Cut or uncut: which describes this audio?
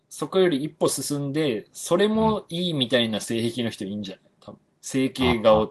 uncut